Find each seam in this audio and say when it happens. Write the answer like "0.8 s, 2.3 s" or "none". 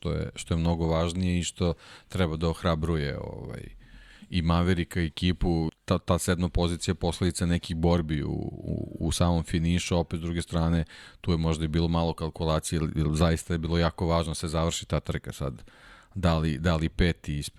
5.7 s